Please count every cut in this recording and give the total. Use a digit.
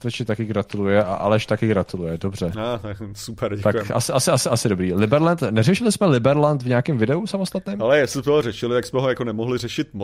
0